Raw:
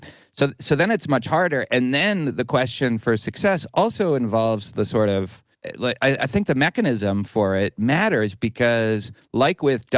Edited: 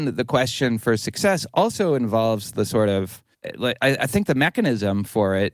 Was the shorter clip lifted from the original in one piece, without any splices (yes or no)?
yes